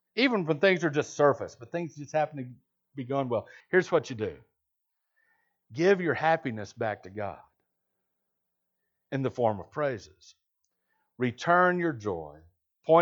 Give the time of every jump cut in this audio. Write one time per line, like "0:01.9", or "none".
0:03.6